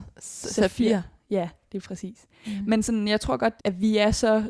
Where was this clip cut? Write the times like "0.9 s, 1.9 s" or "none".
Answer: 2.4 s, 3.6 s